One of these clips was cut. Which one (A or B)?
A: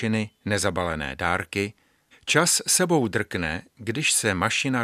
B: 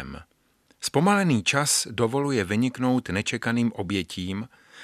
A